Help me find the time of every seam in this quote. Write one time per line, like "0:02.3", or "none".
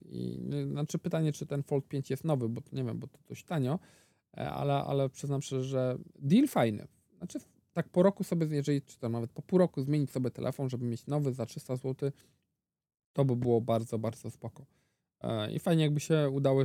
none

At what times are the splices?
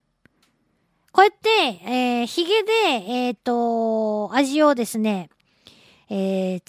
none

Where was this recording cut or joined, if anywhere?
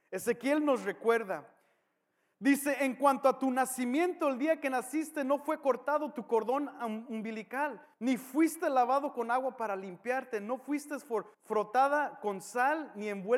0:07.9
0:11.3

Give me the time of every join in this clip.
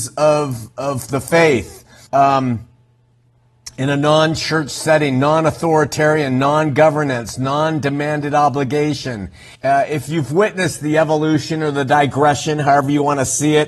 0:02.1
0:09.5

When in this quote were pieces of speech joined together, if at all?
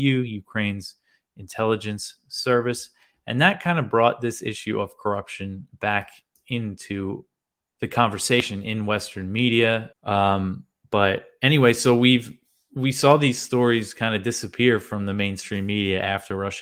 0:07.7
0:09.9

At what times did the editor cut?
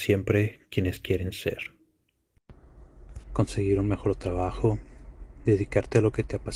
0:03.2

